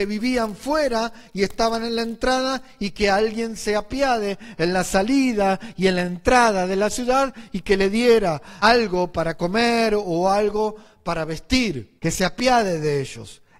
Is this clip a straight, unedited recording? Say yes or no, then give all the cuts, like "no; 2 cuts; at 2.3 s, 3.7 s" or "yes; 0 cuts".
no; 2 cuts; at 8.6 s, 12.0 s